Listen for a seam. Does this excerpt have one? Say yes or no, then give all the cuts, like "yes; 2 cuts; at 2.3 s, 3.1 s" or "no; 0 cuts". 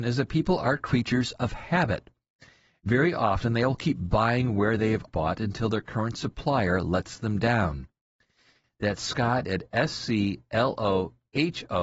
yes; 2 cuts; at 5.1 s, 8.6 s